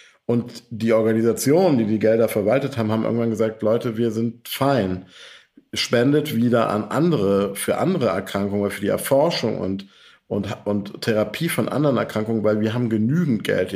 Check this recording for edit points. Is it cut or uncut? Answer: uncut